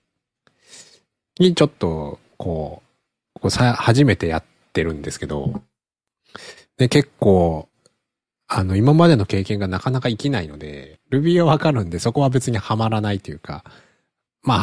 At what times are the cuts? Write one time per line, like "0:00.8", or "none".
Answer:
0:11.0